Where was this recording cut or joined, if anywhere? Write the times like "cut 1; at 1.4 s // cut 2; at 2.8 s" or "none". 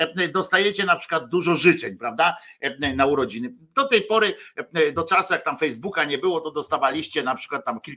none